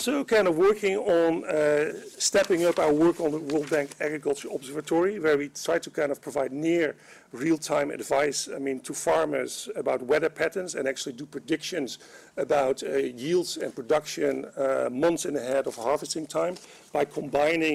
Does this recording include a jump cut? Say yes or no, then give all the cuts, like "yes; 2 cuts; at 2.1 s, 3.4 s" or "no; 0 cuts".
no; 0 cuts